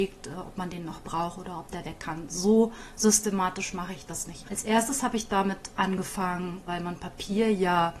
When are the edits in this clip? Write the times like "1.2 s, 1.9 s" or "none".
4.4 s, 6.7 s